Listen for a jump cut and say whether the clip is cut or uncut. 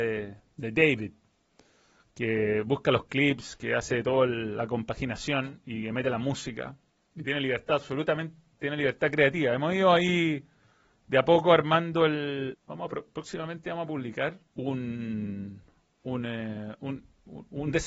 cut